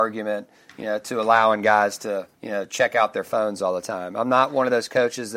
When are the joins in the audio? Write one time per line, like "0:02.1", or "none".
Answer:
0:02.4